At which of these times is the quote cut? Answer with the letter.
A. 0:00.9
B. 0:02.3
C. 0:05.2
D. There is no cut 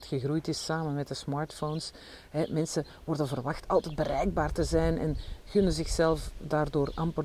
D